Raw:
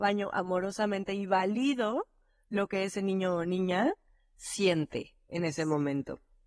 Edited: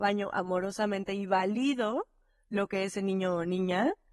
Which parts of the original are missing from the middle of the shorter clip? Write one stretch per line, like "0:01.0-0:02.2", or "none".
none